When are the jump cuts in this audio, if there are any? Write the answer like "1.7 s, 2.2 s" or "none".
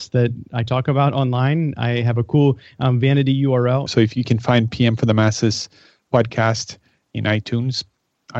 3.9 s